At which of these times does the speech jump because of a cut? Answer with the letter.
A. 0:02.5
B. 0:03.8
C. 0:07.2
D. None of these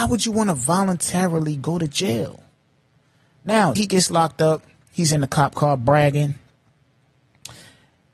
B